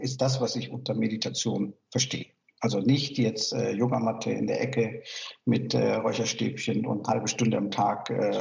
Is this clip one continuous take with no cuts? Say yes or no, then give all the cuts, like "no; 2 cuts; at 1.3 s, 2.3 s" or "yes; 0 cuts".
yes; 0 cuts